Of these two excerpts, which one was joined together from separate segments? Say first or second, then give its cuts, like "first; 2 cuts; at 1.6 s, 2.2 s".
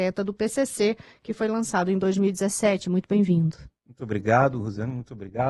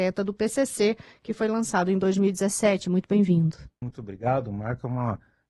second; 1 cut; at 3.8 s